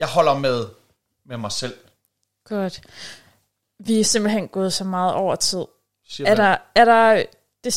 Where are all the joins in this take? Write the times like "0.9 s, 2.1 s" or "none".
none